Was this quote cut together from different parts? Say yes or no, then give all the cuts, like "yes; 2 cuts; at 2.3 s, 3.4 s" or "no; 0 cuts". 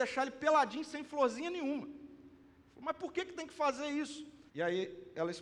yes; 1 cut; at 4.5 s